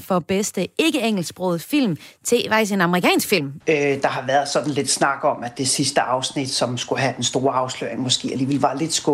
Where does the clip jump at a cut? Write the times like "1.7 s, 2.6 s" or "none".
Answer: 3.6 s